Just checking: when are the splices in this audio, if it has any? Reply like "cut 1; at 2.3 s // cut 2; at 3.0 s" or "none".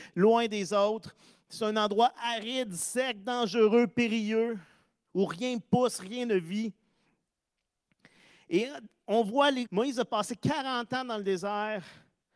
cut 1; at 9.7 s